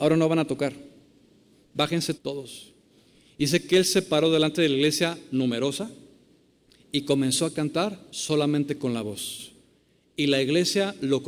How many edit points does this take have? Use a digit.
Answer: 1